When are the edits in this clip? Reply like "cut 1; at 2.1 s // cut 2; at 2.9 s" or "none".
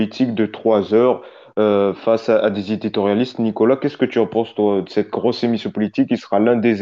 none